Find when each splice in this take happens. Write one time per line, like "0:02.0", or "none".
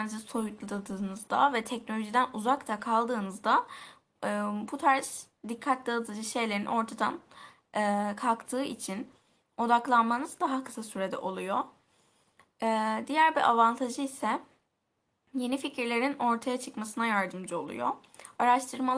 none